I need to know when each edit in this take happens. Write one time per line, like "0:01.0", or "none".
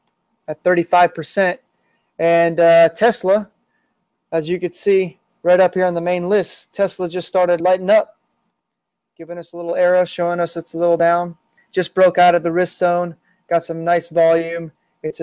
0:07.6
0:11.6